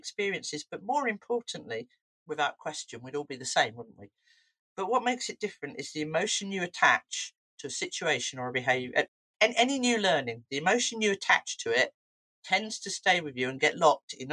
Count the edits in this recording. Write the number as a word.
one